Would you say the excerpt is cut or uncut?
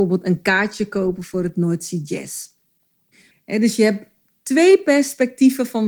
cut